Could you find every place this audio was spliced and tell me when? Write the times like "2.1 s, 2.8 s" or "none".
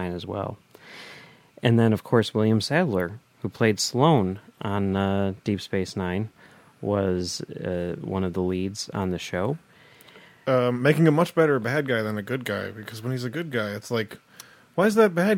none